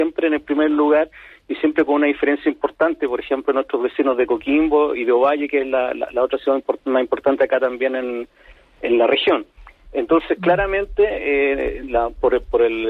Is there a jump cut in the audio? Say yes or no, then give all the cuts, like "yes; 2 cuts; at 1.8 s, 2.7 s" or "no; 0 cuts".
no; 0 cuts